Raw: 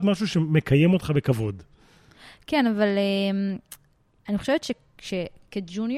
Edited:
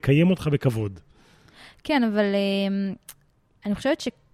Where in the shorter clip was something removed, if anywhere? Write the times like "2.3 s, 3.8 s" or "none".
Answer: none